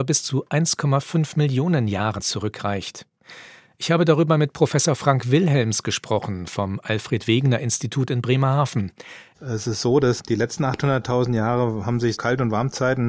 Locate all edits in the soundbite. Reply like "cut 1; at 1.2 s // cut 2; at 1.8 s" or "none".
cut 1; at 9.3 s // cut 2; at 12.1 s